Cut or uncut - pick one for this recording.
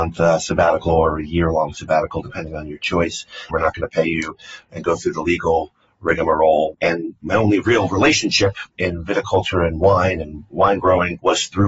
cut